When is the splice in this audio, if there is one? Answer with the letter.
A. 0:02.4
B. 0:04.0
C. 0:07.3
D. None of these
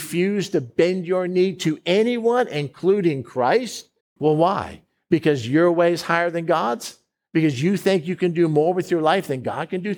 B